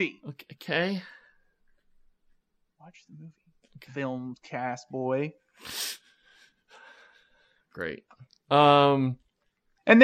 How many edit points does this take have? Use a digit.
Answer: 0